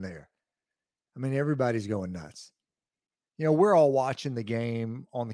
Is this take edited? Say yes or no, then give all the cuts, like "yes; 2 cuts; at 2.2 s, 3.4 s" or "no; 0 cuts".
yes; 1 cut; at 3.2 s